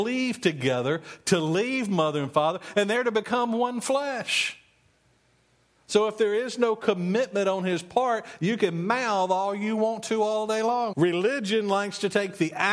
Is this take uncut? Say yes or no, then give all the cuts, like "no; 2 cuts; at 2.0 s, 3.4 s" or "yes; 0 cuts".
no; 1 cut; at 10.9 s